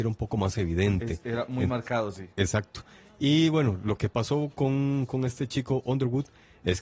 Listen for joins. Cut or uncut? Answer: uncut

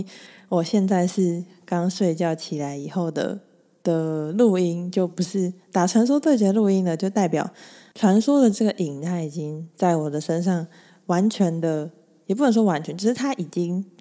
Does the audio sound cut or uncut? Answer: uncut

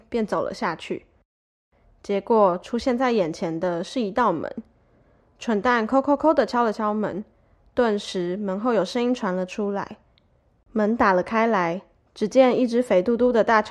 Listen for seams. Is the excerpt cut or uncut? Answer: cut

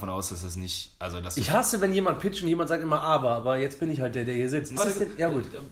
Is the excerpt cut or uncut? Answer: cut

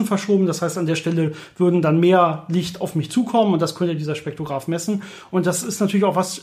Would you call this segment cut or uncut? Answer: uncut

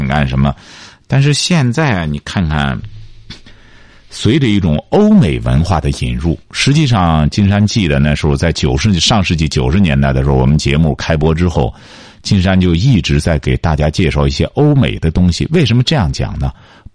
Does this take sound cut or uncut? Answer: uncut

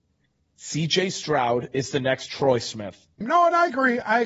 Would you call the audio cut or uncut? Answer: cut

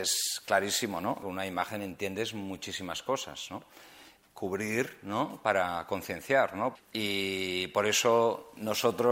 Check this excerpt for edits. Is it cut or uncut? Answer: cut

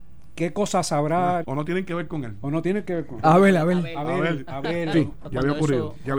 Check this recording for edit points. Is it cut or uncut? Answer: cut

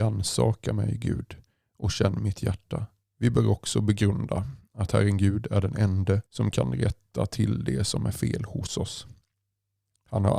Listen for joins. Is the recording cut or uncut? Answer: cut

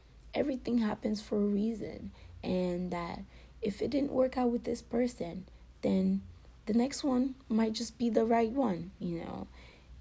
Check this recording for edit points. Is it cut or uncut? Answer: uncut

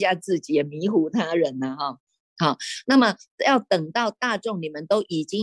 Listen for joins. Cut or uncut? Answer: cut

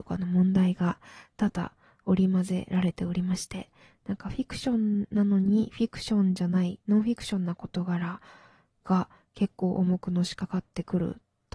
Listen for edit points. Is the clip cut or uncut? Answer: uncut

